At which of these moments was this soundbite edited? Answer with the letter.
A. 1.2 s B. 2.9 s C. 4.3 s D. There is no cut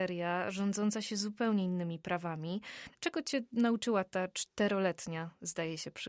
B